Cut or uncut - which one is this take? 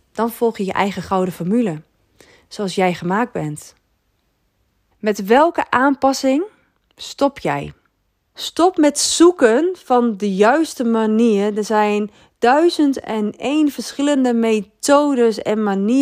cut